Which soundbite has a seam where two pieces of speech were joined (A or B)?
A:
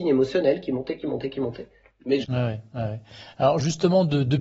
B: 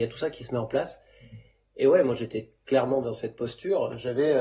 A